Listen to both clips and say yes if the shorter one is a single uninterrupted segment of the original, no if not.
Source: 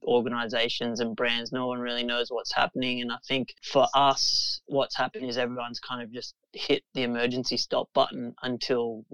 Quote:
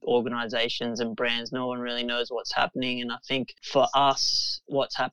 yes